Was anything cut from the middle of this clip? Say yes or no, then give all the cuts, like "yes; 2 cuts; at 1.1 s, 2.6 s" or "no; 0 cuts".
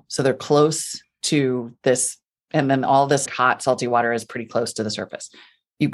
yes; 1 cut; at 3.3 s